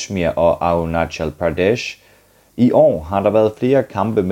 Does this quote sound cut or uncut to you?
uncut